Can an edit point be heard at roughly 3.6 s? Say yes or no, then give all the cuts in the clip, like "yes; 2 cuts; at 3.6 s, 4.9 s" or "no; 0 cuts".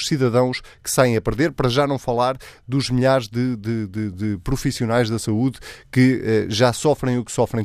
no; 0 cuts